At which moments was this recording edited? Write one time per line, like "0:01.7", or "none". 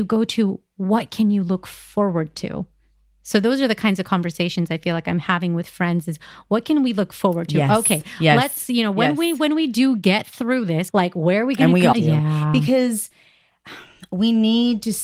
0:10.9
0:11.9